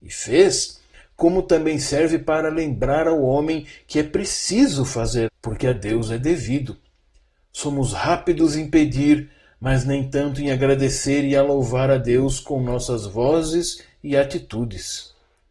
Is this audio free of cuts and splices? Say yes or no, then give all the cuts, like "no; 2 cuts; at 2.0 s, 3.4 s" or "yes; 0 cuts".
no; 1 cut; at 5.3 s